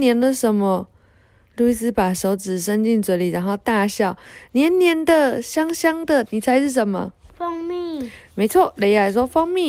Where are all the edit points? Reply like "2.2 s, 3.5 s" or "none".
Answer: 6.3 s